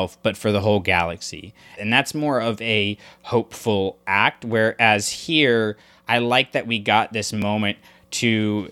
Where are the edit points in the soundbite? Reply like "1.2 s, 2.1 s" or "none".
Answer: 1.8 s

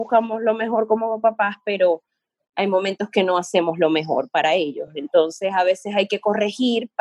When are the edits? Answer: none

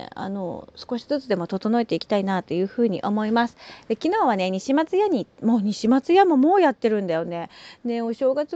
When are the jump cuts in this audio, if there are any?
none

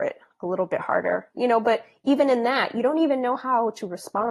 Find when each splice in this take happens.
1.4 s

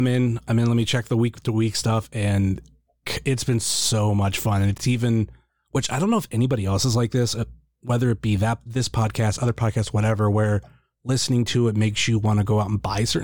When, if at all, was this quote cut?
none

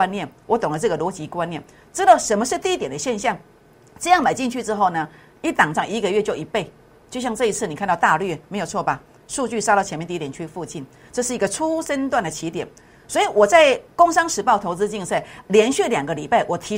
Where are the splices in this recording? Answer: 5.7 s

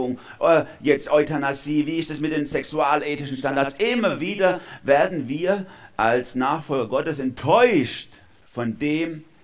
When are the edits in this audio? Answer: none

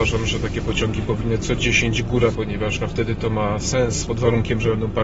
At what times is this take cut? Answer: 2.3 s, 4.1 s

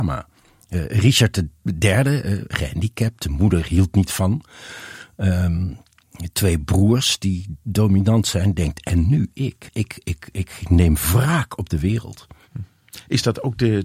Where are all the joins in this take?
9.7 s

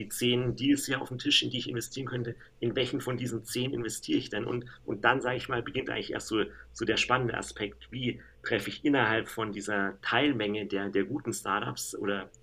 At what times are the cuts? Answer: 8.3 s

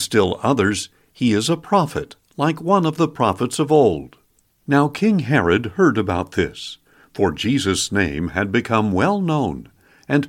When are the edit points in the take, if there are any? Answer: 4.5 s

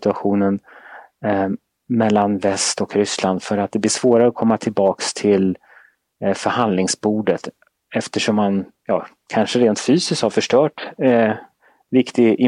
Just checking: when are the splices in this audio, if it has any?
none

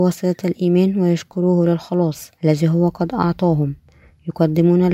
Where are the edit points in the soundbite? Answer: 2.4 s

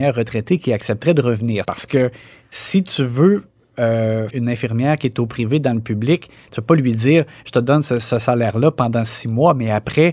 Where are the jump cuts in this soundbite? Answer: 1.6 s, 4.3 s

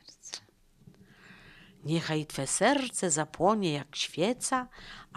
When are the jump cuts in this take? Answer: none

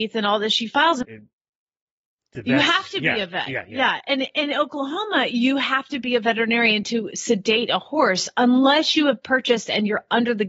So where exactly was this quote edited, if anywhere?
1.0 s

